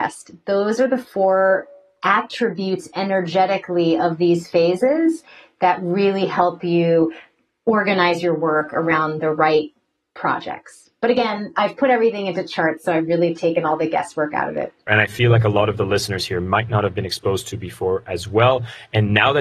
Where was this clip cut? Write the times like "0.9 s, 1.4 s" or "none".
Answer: 14.9 s

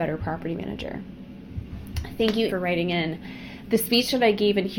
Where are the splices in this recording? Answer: 2.5 s

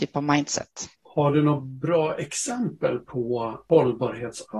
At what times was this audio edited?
none

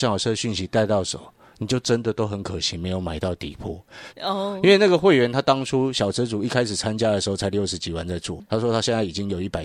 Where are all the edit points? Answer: 4.1 s

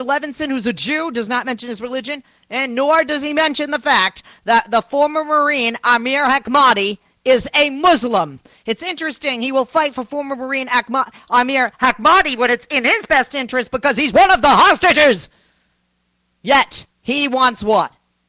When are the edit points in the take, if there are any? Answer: 16.9 s

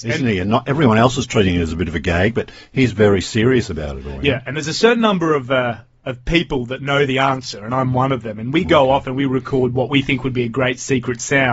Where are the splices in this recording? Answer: none

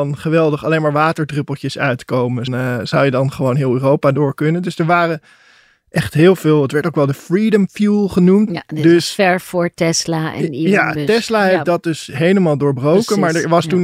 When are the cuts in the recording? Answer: 2.5 s, 8.5 s

